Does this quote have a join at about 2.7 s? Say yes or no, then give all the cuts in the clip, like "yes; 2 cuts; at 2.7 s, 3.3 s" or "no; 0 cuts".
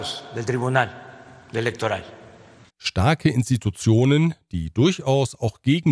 yes; 1 cut; at 2.7 s